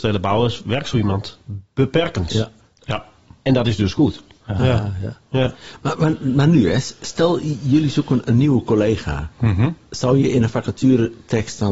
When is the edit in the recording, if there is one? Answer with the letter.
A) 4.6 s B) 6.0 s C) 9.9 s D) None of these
A